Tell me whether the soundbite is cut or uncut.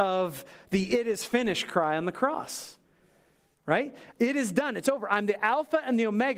uncut